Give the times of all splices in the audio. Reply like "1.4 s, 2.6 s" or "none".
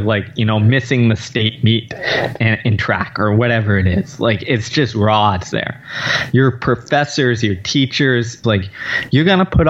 5.5 s, 8.4 s